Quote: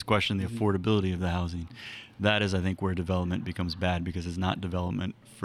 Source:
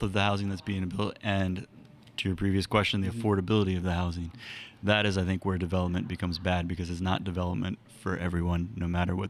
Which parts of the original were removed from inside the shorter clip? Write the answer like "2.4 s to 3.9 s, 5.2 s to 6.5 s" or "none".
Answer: none